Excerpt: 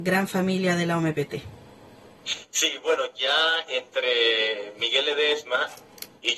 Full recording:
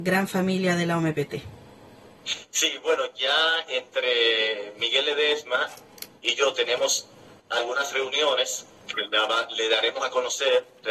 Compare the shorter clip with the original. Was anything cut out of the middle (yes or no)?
no